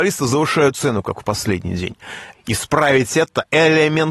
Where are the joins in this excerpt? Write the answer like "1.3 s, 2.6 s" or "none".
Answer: 2.3 s